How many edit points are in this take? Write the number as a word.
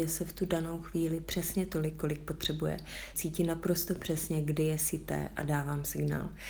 one